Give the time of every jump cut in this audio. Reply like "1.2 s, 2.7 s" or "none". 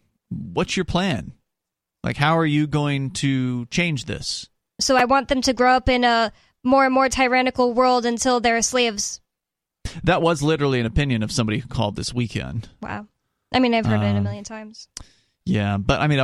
4.8 s